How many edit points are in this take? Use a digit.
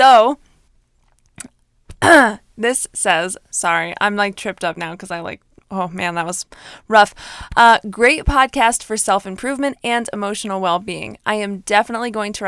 0